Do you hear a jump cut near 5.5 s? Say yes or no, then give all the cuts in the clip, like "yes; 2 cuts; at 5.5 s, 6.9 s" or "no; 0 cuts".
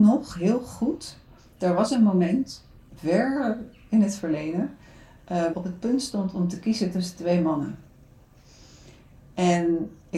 yes; 1 cut; at 5.5 s